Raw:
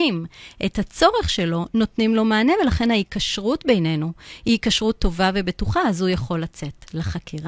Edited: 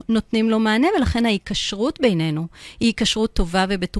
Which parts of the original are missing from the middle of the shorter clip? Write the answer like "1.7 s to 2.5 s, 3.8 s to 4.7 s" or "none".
none